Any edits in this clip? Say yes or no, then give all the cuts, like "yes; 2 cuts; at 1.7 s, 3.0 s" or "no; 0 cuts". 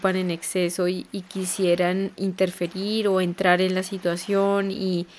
yes; 1 cut; at 2.2 s